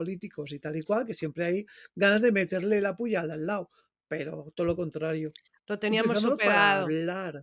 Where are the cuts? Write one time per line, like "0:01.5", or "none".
0:05.6